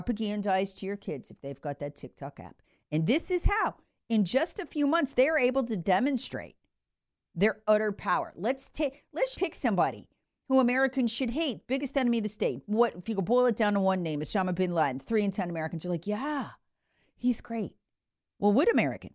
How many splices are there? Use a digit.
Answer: 1